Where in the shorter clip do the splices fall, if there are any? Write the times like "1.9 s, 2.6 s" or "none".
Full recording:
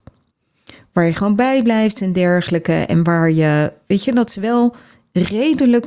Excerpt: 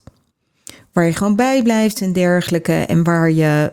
none